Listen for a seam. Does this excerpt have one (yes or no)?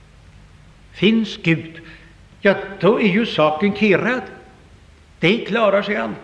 no